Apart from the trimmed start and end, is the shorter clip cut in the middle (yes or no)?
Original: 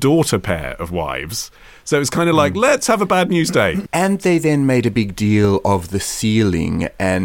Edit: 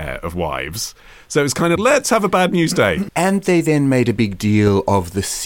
yes